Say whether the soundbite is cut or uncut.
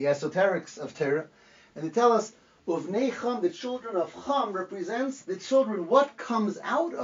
uncut